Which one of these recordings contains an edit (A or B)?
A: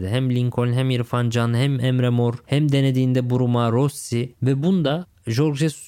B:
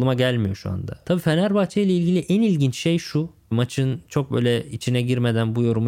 B